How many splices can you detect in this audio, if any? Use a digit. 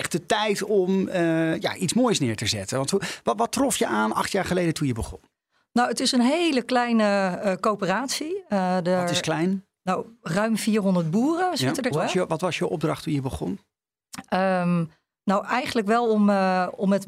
1